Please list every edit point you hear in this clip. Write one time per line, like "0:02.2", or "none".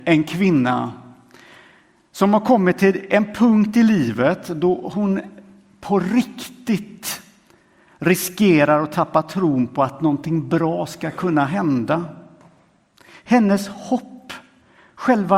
none